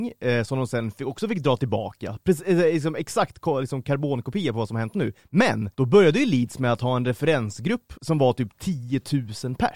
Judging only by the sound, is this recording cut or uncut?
cut